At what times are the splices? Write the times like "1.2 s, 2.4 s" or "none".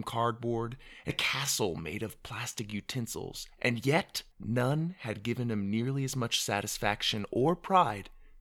1.1 s, 4.3 s